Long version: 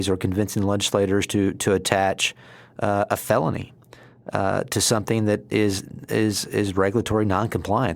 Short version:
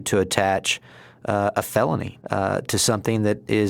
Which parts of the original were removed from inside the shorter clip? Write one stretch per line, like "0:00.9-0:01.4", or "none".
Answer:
0:03.8-0:04.2